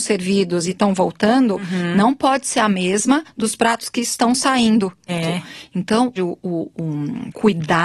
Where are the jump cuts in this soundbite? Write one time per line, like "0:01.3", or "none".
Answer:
0:05.1
0:06.2